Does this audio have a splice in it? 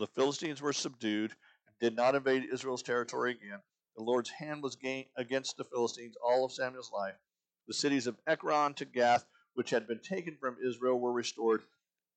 no; 0 cuts

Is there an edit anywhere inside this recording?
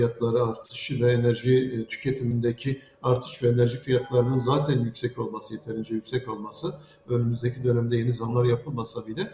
no; 0 cuts

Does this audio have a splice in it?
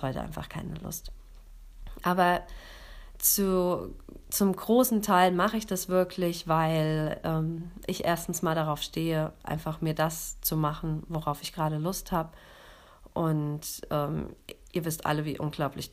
no; 0 cuts

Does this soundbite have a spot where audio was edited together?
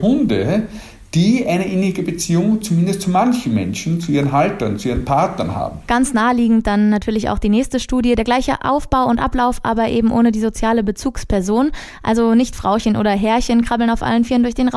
no; 0 cuts

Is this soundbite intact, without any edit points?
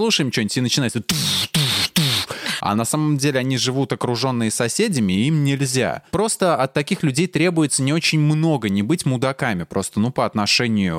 no; 1 cut; at 2.6 s

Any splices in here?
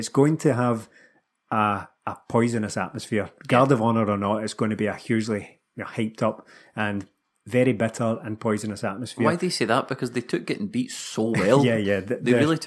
no; 0 cuts

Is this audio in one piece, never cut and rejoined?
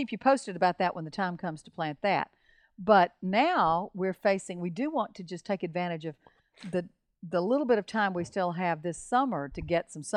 yes; 0 cuts

